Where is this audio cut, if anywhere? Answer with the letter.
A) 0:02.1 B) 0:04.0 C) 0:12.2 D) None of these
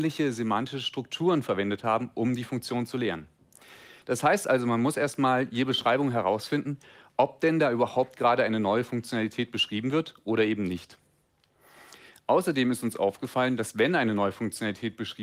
B